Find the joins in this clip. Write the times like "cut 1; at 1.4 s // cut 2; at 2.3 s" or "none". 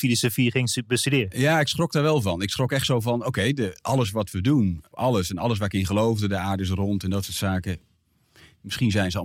cut 1; at 4.9 s